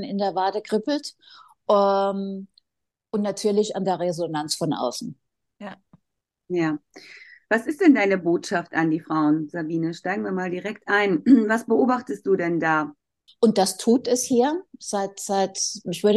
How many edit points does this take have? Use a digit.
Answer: 1